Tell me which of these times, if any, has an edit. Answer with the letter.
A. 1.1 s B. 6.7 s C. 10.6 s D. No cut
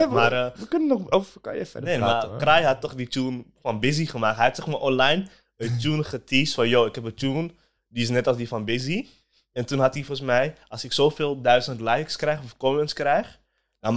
D